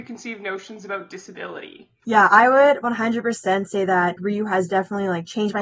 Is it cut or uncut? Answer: cut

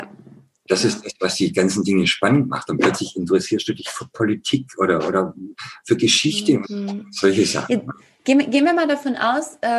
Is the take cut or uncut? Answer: cut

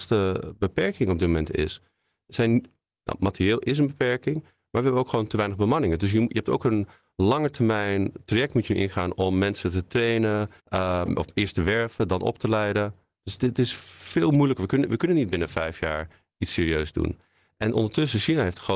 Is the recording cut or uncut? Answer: cut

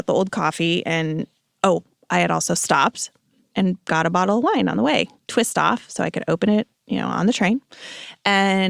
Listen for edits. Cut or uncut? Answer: uncut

